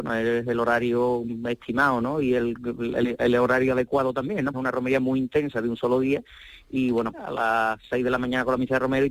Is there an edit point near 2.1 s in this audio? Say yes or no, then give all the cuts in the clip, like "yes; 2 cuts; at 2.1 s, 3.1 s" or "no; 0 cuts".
no; 2 cuts; at 4.5 s, 7.1 s